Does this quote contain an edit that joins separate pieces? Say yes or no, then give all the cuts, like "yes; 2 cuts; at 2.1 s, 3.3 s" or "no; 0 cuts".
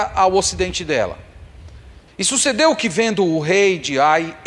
yes; 1 cut; at 2.1 s